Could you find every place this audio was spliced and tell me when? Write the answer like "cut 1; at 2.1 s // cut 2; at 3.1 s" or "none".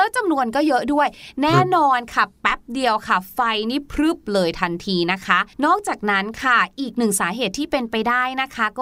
cut 1; at 5.5 s